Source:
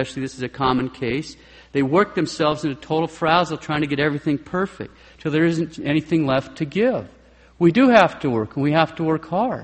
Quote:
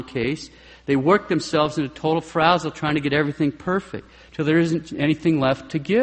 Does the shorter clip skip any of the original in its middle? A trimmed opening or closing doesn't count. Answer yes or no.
no